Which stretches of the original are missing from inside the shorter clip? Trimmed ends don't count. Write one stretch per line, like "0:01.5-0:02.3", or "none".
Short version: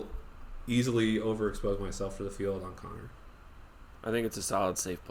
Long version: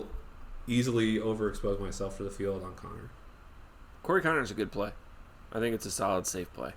0:04.0-0:05.5